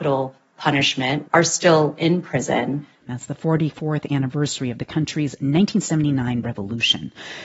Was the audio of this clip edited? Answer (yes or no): yes